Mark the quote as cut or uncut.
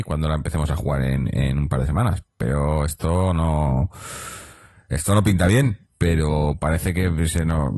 cut